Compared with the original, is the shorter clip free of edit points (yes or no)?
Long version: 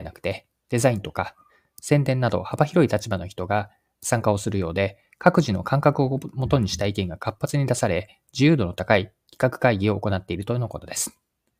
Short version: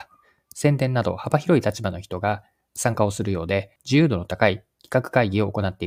no